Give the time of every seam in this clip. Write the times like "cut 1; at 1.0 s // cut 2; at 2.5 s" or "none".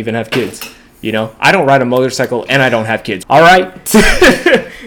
cut 1; at 3.2 s